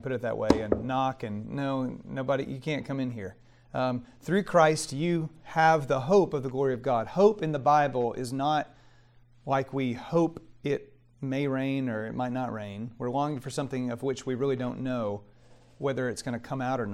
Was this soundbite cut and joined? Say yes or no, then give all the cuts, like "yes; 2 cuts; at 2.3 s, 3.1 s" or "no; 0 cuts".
no; 0 cuts